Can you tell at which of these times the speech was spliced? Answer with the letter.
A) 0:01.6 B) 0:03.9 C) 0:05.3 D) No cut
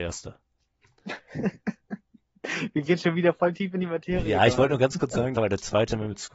C